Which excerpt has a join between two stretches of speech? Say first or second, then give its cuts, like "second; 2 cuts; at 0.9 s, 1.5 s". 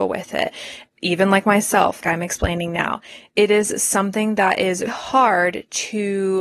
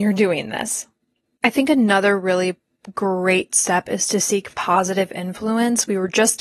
first; 2 cuts; at 2.0 s, 4.9 s